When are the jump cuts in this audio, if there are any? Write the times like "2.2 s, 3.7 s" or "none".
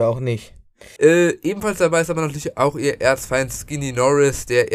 1.0 s